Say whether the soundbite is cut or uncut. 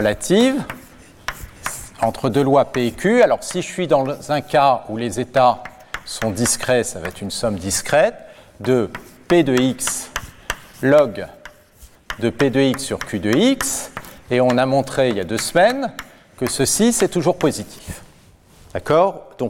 uncut